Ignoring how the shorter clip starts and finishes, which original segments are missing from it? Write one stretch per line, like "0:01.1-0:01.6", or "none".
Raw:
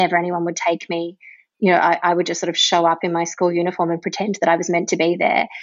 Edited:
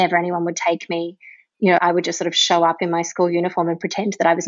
0:01.8-0:02.0